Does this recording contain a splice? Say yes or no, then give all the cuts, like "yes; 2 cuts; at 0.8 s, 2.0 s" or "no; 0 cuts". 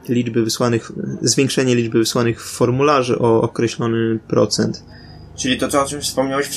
no; 0 cuts